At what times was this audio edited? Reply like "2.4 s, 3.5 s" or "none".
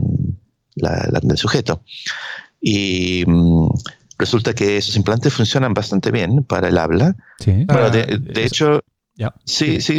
1.2 s, 7.7 s